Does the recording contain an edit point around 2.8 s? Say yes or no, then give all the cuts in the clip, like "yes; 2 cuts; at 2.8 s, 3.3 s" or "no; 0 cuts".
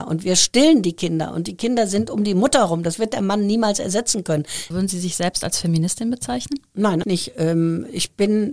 no; 2 cuts; at 4.7 s, 7.0 s